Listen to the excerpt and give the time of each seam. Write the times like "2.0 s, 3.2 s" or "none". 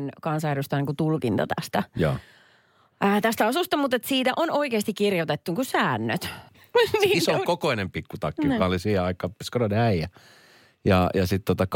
6.5 s